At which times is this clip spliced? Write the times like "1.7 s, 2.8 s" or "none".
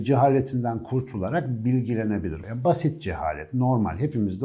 2.4 s